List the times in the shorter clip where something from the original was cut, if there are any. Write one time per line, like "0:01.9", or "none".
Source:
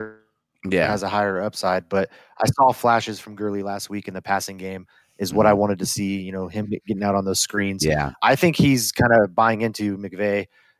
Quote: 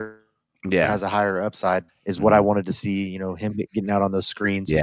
0:01.9

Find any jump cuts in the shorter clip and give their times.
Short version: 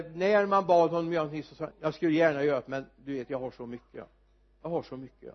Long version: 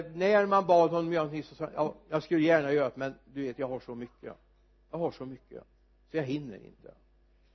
0:01.7

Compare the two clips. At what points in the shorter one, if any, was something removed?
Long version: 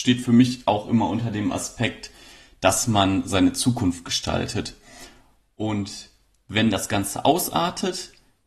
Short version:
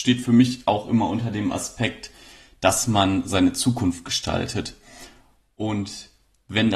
none

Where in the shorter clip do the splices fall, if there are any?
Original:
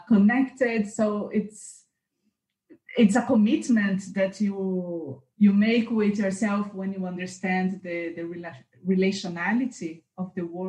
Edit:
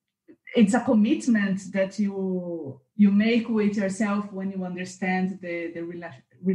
none

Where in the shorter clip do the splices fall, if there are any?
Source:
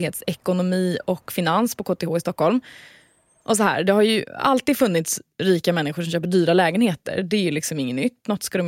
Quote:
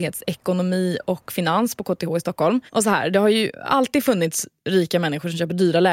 0:02.7

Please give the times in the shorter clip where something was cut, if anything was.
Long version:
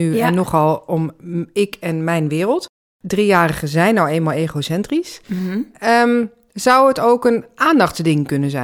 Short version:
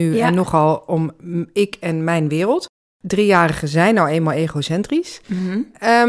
none

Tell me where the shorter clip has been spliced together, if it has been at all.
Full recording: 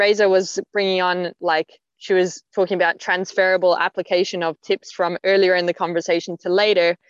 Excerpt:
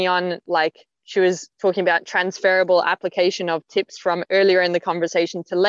none

